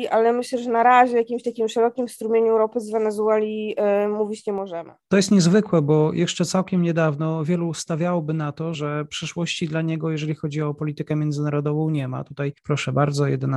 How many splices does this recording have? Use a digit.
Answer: 1